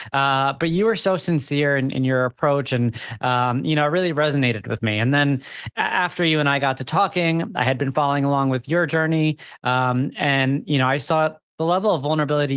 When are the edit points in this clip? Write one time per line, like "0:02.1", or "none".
none

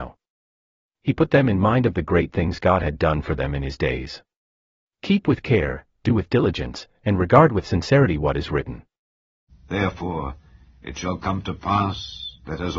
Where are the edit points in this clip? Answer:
0:04.8
0:09.5

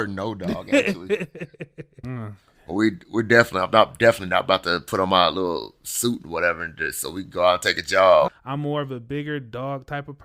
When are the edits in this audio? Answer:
0:02.0
0:08.3

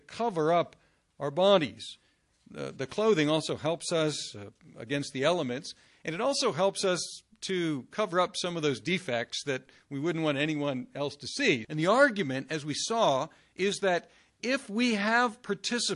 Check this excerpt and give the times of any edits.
0:11.6

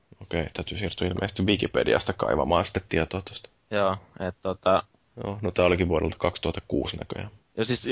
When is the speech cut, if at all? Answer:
0:05.0

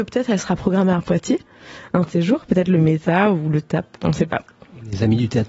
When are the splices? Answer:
0:03.9

